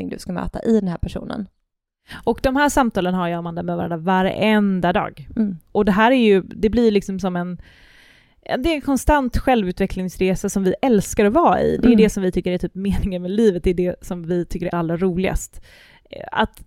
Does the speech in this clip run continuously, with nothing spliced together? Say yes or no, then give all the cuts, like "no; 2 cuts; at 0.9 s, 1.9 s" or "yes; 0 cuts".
no; 1 cut; at 14.7 s